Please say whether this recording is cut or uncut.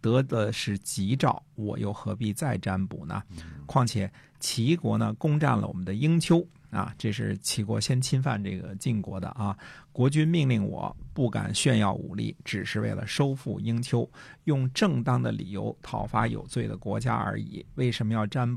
uncut